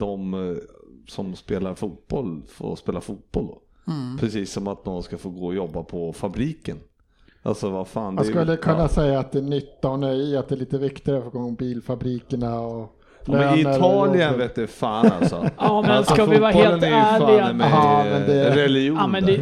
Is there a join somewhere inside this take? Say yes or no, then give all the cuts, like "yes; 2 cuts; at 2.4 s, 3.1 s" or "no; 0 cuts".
no; 0 cuts